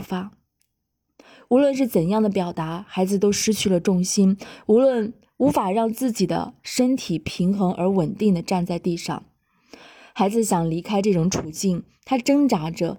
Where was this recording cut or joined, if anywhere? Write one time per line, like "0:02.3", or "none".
none